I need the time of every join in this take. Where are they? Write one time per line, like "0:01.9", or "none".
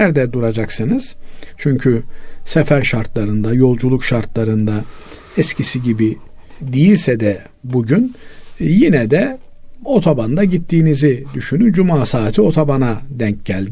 0:01.5